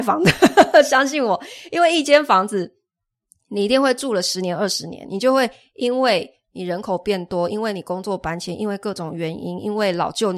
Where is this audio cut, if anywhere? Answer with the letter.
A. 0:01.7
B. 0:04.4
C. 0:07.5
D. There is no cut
D